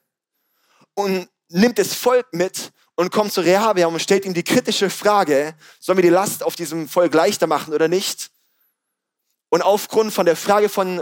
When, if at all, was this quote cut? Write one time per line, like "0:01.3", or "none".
none